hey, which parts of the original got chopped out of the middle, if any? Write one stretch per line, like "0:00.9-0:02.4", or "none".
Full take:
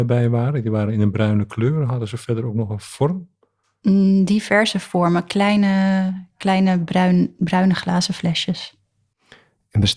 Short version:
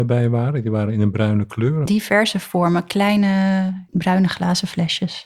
0:01.9-0:04.3
0:06.3-0:07.4